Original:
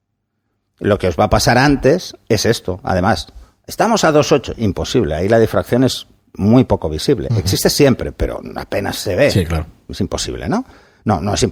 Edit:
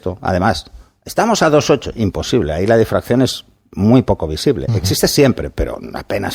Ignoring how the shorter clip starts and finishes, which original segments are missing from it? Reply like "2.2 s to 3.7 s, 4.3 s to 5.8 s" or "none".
none